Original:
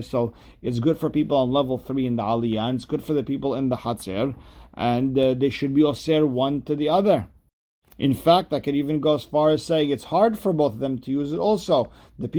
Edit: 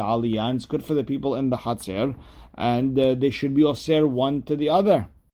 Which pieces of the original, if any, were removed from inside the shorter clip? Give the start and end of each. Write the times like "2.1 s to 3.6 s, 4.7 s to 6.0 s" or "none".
none